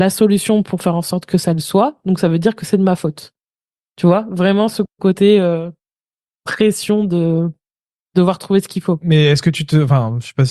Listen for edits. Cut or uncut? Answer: uncut